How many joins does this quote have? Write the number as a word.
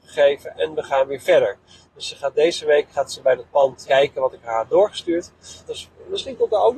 two